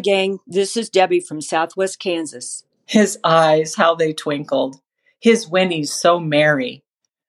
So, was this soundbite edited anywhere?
yes; 1 cut; at 2.8 s

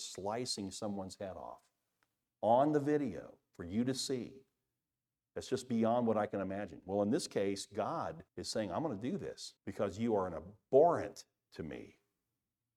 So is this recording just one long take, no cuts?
no; 2 cuts; at 8.3 s, 9.6 s

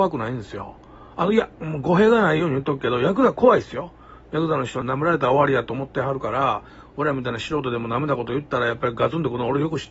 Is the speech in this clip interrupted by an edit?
yes; 1 cut; at 4.8 s

